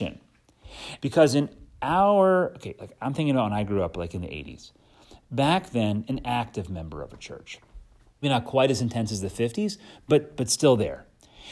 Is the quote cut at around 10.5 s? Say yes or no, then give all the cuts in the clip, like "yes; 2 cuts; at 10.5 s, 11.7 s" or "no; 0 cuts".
no; 3 cuts; at 1.0 s, 6.0 s, 8.2 s